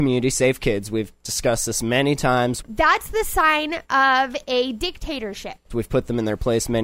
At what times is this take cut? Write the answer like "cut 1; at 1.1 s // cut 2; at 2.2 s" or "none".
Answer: cut 1; at 2.6 s // cut 2; at 5.7 s